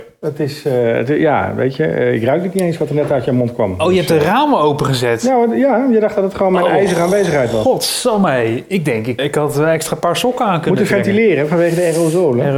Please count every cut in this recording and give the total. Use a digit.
1